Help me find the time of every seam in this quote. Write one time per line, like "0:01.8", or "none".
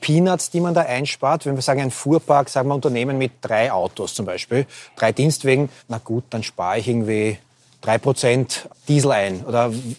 0:05.8
0:08.7